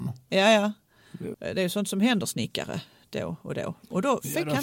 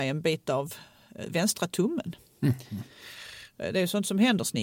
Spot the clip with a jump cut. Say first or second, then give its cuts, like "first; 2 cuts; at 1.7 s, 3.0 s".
first; 1 cut; at 1.3 s